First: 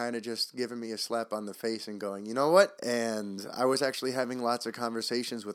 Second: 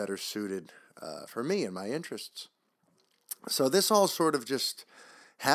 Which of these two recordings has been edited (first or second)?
first